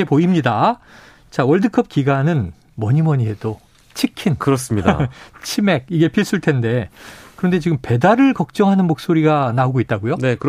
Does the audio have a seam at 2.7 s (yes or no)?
no